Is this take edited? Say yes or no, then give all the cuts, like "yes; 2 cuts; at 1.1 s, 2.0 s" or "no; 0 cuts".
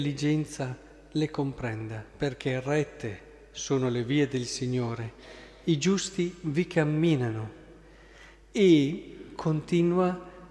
no; 0 cuts